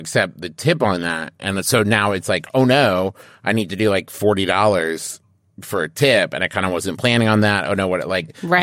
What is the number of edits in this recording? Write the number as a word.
zero